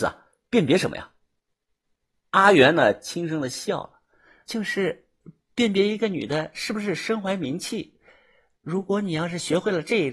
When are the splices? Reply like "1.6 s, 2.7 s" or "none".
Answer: 4.5 s